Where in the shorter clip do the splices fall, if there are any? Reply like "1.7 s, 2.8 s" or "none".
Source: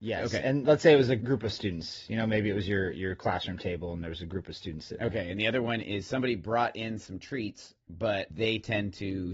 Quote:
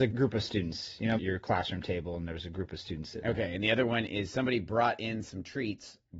1.2 s